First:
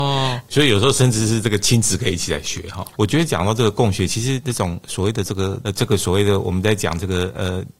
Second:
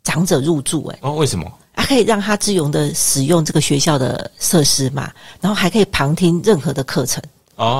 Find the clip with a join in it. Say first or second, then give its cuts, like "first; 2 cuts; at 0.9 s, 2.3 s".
first; 2 cuts; at 2.9 s, 5.6 s